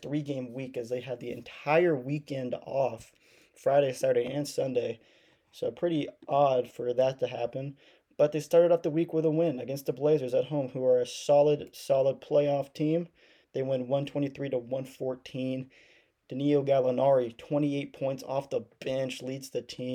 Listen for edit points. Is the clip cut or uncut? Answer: uncut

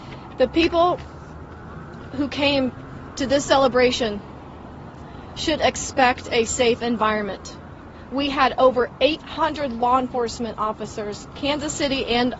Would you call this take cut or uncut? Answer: uncut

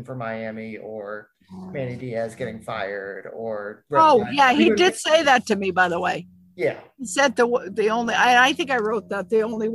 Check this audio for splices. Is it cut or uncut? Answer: uncut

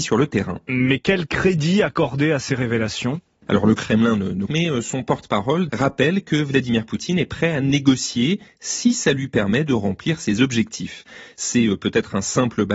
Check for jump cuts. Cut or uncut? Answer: cut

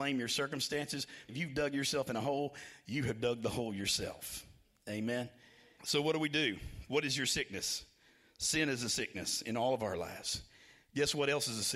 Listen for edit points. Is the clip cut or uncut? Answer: cut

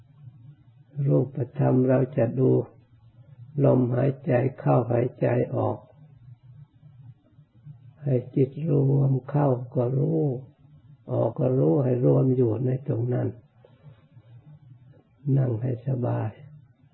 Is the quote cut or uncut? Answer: cut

